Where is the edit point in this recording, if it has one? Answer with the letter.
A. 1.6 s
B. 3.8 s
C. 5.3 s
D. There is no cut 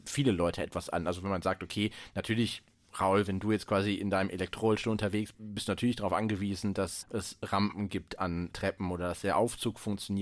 C